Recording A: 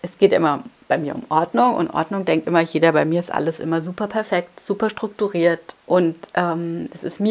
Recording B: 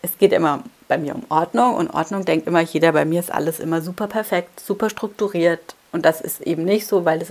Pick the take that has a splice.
A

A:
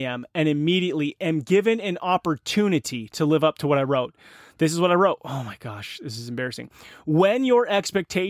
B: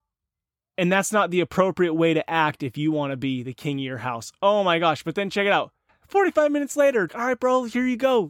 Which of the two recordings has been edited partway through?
B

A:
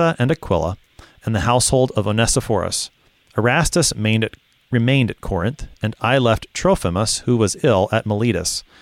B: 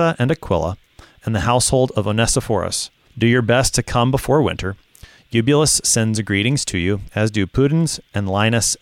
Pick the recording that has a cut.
B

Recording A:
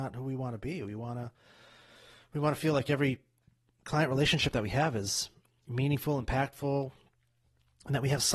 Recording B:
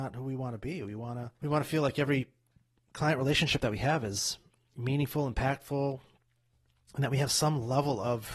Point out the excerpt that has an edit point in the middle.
B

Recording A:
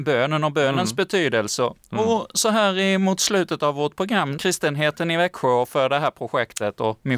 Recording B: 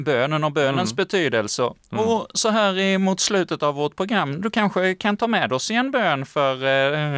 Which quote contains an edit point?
A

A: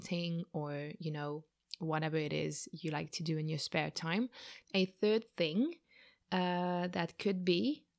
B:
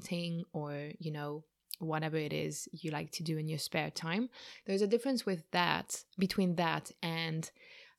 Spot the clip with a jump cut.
A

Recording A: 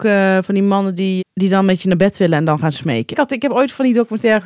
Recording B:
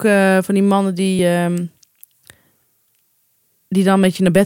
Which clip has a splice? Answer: A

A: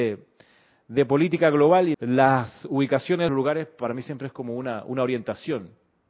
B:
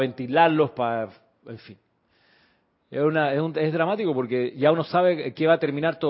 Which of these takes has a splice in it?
A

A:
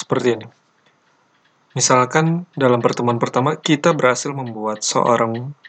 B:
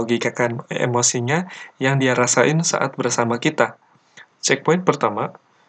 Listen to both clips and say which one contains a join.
B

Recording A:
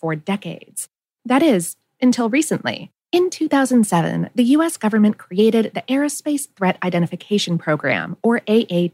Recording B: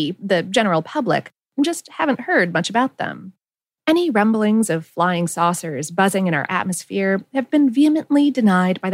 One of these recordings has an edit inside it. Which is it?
A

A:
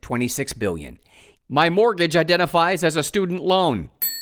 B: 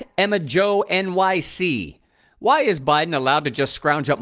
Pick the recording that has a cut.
A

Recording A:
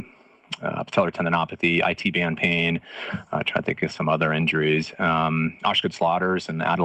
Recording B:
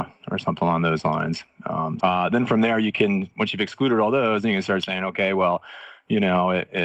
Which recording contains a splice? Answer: B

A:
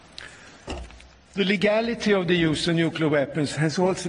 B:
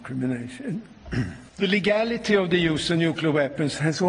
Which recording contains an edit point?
B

